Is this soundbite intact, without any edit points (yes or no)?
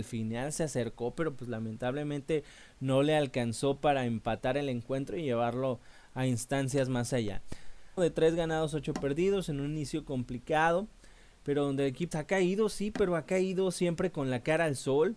no